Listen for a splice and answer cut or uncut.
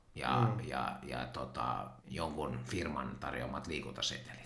cut